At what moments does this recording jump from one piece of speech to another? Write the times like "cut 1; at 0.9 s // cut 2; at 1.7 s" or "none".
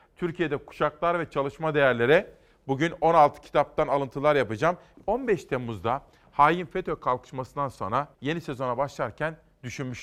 cut 1; at 4.9 s // cut 2; at 8.1 s